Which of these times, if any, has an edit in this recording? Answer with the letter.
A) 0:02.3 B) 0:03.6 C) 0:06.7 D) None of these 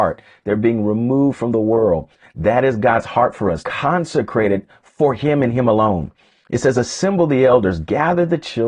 B